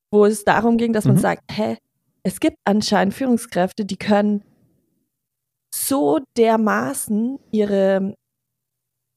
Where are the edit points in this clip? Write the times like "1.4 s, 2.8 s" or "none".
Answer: none

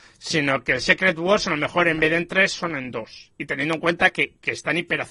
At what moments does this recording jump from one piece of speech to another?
none

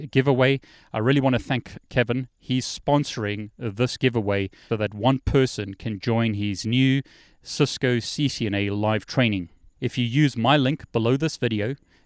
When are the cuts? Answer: 4.7 s, 9.8 s

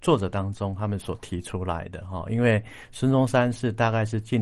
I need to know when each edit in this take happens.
none

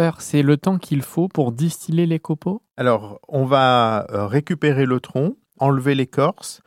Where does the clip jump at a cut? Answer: 2.7 s, 5.6 s

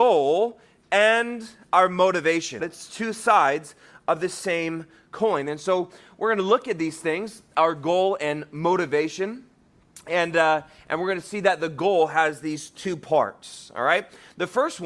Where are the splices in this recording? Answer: 2.6 s

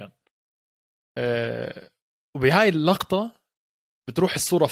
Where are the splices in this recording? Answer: none

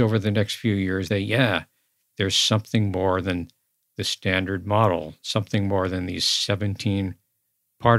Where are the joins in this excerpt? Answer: 1.1 s

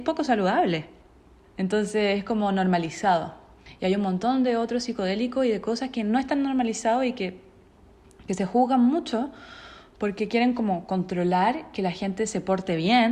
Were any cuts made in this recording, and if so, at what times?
1.5 s

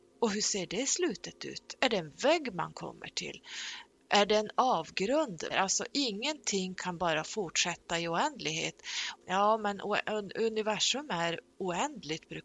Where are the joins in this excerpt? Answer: 5.5 s, 9.2 s

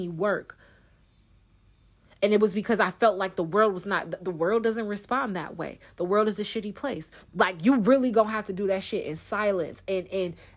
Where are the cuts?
7.3 s

